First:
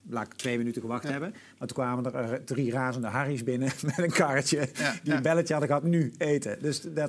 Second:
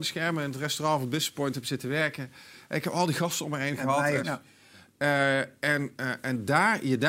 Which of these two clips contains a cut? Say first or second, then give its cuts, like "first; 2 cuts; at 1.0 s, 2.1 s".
second; 1 cut; at 4.2 s